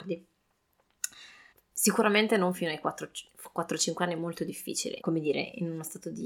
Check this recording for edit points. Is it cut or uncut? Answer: cut